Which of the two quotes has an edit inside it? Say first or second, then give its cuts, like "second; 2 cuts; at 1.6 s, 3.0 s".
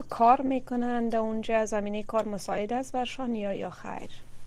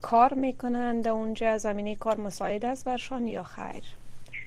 second; 1 cut; at 3.3 s